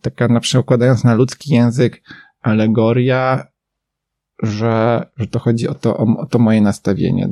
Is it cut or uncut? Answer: uncut